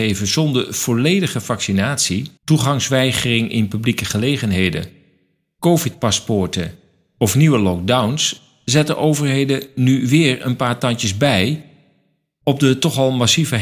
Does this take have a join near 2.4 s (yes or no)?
yes